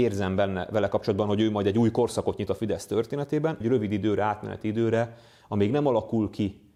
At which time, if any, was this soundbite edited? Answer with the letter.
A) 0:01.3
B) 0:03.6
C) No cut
B